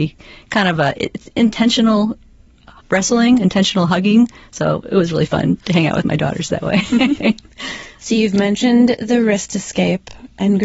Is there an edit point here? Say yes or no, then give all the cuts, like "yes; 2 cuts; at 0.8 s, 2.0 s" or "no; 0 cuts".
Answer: no; 0 cuts